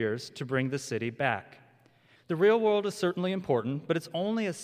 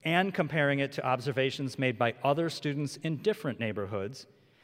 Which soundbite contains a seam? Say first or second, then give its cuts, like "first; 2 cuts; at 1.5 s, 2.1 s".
first; 1 cut; at 2.2 s